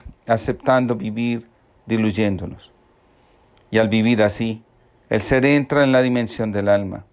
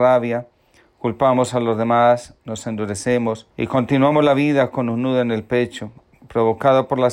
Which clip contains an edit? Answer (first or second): second